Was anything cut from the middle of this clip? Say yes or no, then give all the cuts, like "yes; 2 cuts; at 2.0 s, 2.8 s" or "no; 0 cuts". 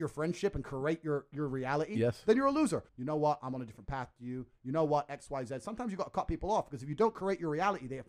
yes; 1 cut; at 2.9 s